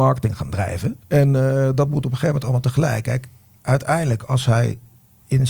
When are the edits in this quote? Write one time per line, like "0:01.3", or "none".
0:01.0